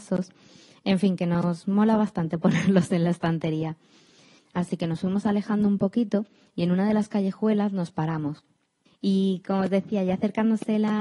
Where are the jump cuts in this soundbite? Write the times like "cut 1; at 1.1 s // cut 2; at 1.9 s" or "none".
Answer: cut 1; at 4.4 s // cut 2; at 8.9 s